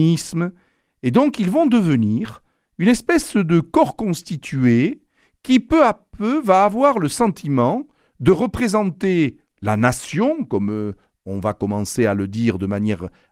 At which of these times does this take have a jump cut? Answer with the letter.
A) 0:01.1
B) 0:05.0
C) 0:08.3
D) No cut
D